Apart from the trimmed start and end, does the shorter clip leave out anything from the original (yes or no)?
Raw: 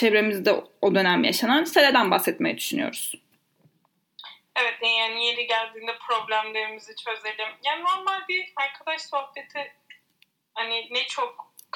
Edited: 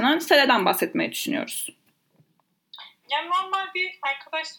yes